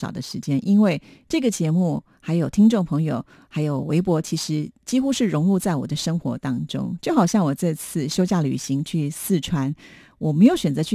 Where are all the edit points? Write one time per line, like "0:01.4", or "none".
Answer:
none